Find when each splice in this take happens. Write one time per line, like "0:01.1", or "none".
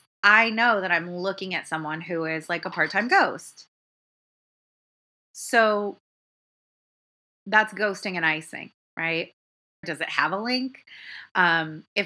0:09.8